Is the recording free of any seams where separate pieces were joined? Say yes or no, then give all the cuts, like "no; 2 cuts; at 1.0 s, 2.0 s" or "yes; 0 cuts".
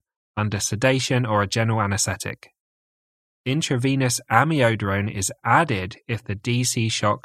yes; 0 cuts